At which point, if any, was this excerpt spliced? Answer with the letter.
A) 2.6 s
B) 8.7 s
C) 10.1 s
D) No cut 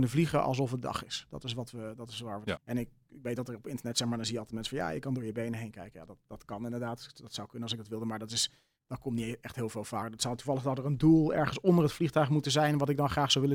A